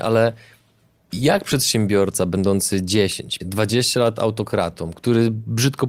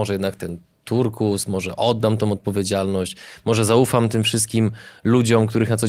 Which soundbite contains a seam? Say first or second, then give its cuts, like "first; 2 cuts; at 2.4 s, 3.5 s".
first; 1 cut; at 3.4 s